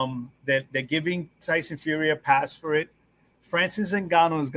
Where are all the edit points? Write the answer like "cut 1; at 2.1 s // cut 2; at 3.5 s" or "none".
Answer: cut 1; at 3.3 s